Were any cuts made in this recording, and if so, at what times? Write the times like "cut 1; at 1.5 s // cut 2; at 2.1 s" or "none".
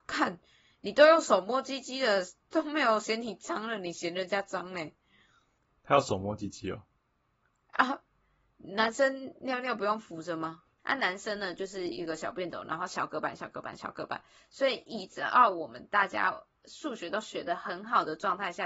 cut 1; at 10.8 s